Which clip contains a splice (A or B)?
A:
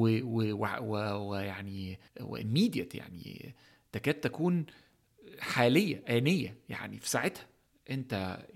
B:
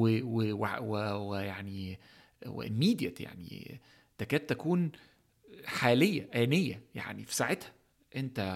A